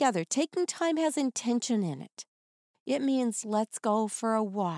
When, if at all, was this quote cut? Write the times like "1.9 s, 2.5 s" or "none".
3.4 s